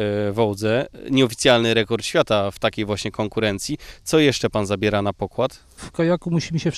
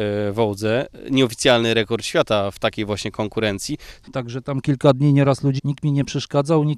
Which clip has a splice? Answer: second; 2 cuts; at 4.0 s, 5.6 s

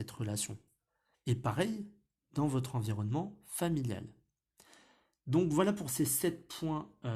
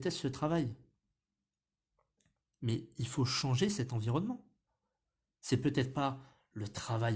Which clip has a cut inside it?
first; 1 cut; at 1.1 s

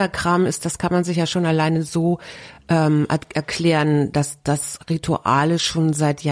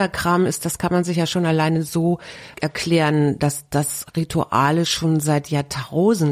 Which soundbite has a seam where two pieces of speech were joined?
second; 1 cut; at 2.5 s

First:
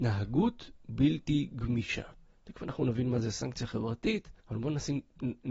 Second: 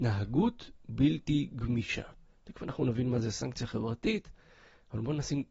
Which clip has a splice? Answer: first; 1 cut; at 4.4 s

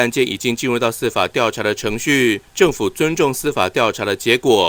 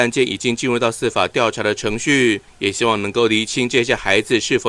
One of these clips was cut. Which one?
second; 1 cut; at 2.5 s

